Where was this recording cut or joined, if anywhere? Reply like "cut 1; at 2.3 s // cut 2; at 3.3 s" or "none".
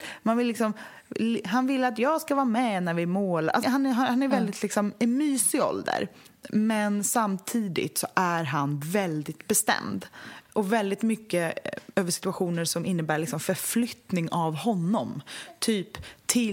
cut 1; at 3.6 s // cut 2; at 10.5 s // cut 3; at 11.9 s